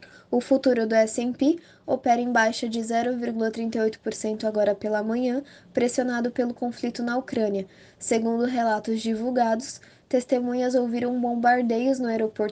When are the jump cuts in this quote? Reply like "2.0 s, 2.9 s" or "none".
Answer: none